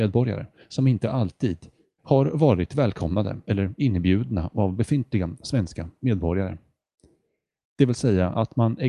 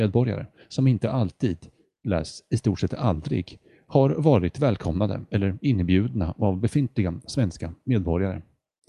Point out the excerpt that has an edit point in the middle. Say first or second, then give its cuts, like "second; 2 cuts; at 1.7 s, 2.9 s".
first; 2 cuts; at 2.0 s, 7.6 s